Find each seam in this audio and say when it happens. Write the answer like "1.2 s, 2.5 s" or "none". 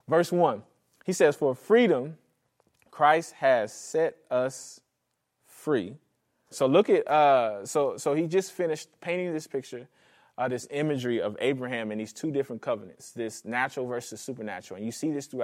6.5 s